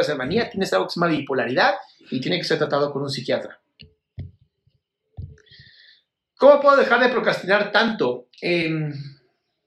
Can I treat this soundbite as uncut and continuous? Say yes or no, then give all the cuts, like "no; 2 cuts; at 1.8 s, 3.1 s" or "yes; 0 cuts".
yes; 0 cuts